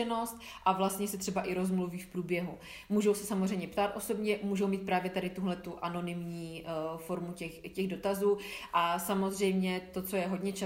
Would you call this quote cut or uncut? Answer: uncut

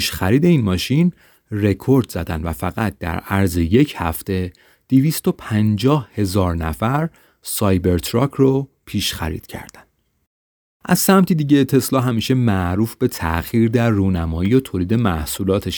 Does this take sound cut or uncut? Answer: uncut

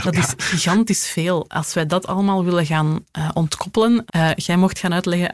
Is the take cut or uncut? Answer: cut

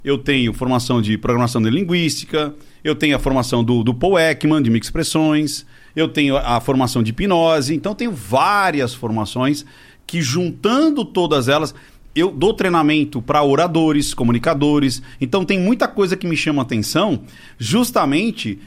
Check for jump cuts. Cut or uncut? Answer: uncut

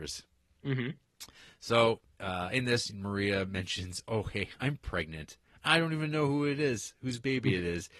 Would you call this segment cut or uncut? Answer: uncut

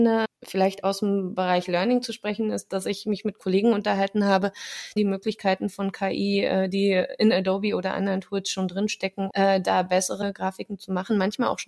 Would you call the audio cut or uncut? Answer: cut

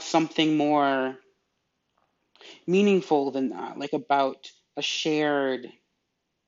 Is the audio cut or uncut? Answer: uncut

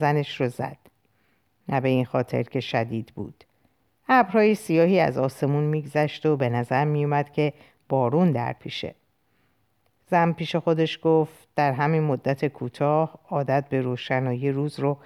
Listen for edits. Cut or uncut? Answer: uncut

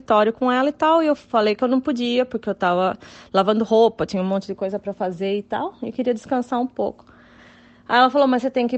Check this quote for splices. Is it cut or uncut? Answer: uncut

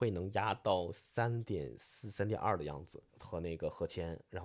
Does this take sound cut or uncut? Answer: cut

